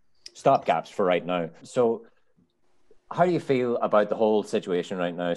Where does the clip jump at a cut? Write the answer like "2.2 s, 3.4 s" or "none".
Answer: 1.6 s